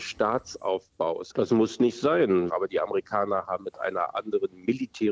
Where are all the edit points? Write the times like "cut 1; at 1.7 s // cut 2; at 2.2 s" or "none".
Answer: cut 1; at 1.3 s // cut 2; at 2.5 s